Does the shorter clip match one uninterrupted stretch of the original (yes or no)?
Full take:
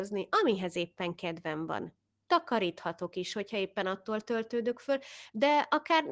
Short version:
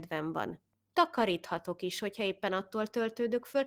yes